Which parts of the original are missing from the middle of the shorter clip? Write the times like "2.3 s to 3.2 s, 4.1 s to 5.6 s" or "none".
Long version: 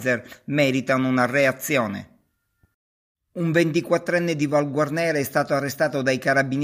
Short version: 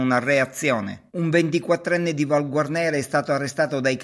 2.1 s to 3.3 s